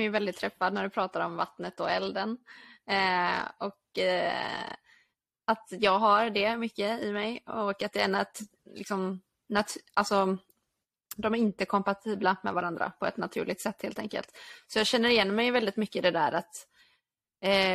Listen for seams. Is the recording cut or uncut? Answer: uncut